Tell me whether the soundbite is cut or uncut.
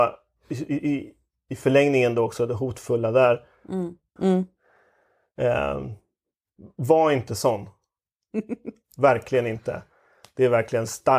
cut